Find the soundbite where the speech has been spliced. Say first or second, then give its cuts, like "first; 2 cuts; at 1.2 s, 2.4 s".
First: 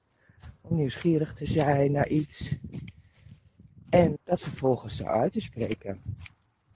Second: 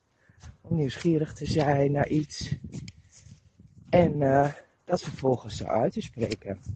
first; 1 cut; at 4.1 s